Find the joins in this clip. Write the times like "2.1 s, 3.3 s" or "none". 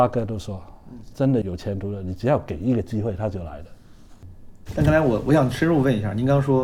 1.4 s, 4.7 s